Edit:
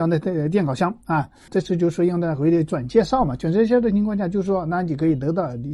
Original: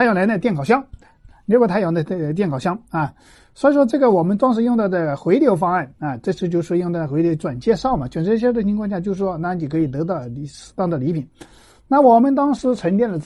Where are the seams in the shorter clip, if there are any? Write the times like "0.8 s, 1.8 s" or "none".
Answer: 1.5 s